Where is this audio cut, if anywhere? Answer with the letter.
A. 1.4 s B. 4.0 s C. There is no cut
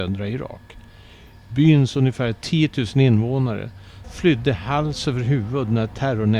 B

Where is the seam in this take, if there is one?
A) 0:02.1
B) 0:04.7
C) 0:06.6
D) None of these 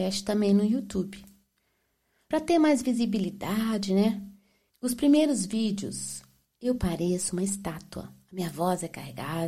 B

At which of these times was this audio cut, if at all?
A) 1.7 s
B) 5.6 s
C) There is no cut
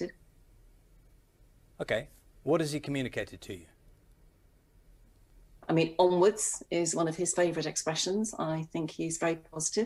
B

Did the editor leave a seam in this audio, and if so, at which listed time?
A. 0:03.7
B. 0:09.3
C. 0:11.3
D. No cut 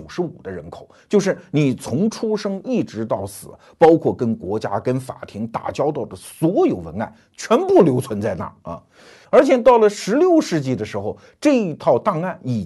B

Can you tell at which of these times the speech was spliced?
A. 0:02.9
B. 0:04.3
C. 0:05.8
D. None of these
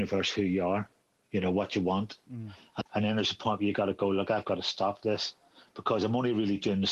A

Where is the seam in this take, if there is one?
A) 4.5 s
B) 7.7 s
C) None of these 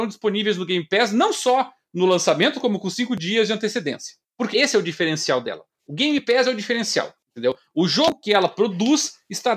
A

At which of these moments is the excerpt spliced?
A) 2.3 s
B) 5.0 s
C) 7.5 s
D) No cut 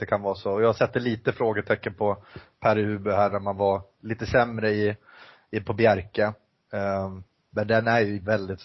D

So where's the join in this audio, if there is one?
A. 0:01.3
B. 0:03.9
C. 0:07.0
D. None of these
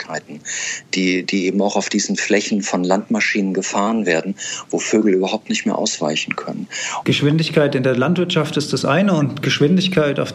C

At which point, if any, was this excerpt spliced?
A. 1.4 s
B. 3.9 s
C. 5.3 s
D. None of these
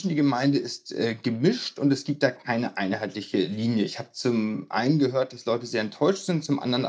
D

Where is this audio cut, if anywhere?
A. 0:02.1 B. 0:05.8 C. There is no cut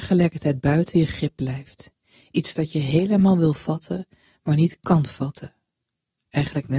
C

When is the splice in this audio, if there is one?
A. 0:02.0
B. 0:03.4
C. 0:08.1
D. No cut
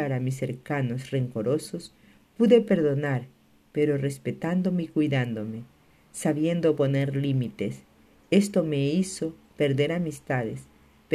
D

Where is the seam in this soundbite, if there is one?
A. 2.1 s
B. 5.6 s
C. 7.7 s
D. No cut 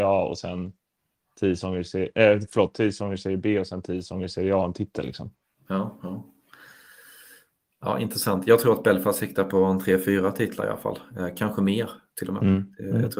D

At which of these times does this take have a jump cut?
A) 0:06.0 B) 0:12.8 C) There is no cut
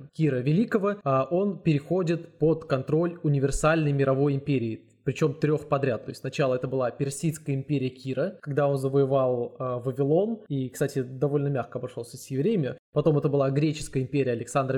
C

